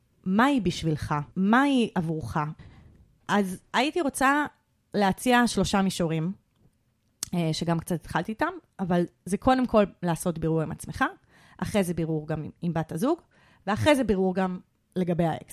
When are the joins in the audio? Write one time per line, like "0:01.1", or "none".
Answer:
0:01.3
0:02.6
0:03.7